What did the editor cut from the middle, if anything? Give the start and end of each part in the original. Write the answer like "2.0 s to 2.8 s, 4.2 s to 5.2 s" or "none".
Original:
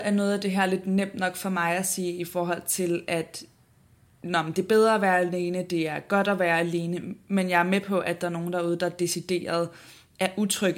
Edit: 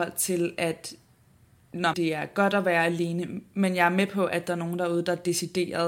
4.4 s to 5.7 s